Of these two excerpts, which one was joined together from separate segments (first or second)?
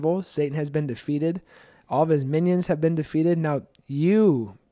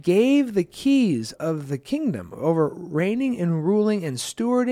second